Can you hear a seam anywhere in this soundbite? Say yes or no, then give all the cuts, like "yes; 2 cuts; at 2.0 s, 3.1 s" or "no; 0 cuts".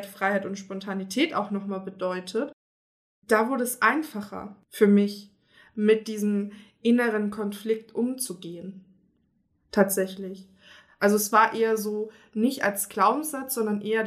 no; 0 cuts